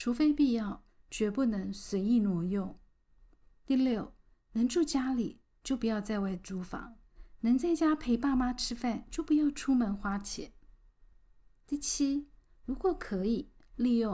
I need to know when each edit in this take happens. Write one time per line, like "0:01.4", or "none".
none